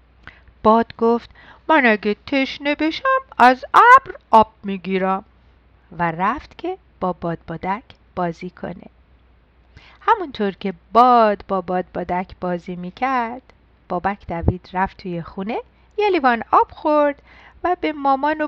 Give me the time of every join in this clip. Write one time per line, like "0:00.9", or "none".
none